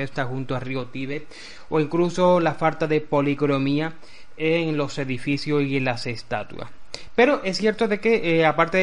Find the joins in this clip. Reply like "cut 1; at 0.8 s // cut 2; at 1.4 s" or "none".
none